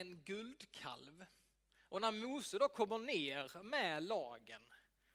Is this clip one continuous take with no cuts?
no; 1 cut; at 1.9 s

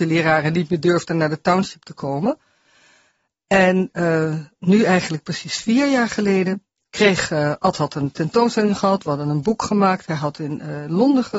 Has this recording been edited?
no; 0 cuts

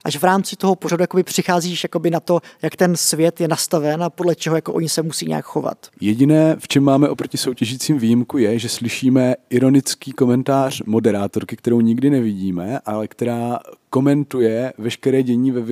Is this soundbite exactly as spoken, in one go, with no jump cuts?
yes; 0 cuts

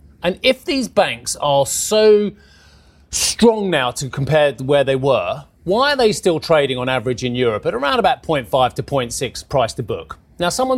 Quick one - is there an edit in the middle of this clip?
no; 0 cuts

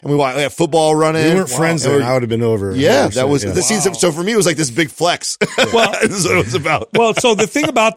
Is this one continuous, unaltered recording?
yes; 0 cuts

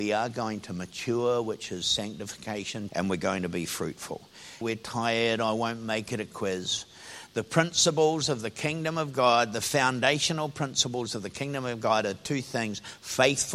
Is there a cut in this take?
yes; 2 cuts; at 2.9 s, 4.6 s

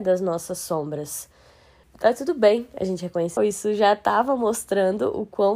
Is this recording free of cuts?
no; 2 cuts; at 1.8 s, 3.4 s

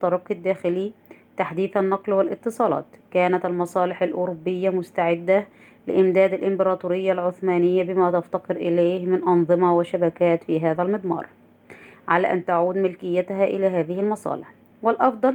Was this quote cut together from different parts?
no; 0 cuts

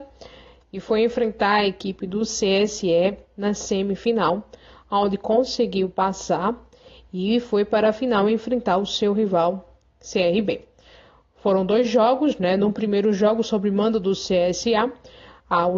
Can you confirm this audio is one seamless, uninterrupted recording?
yes; 0 cuts

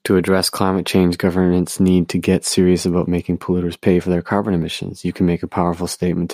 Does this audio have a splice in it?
no; 0 cuts

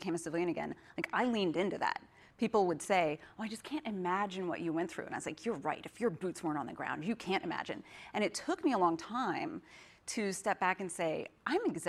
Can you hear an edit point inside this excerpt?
no; 0 cuts

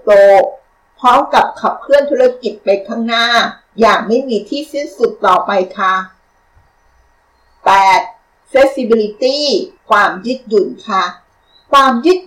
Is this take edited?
yes; 2 cuts; at 8.4 s, 9.8 s

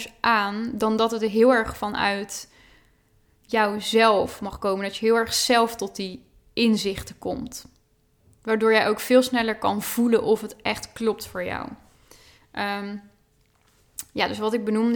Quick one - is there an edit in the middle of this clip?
no; 0 cuts

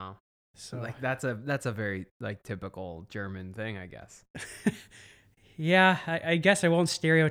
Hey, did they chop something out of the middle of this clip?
no; 0 cuts

